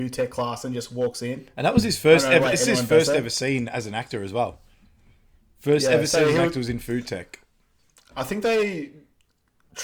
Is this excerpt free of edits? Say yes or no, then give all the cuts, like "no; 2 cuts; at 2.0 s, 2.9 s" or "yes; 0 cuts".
yes; 0 cuts